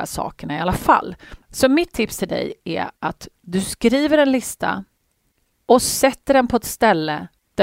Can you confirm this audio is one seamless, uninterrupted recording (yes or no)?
no